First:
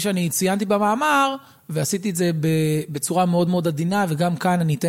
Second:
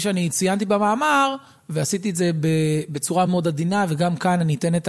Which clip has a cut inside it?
second; 1 cut; at 3.3 s

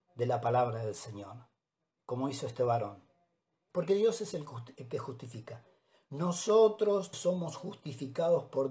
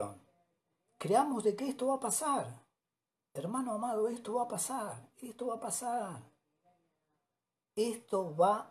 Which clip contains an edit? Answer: first; 2 cuts; at 3.7 s, 7.1 s

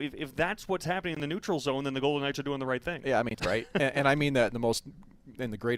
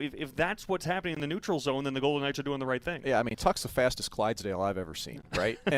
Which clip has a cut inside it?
first; 1 cut; at 3.4 s

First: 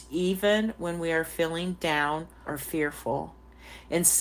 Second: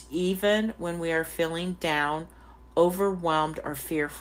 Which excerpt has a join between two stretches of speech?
first; 1 cut; at 2.4 s

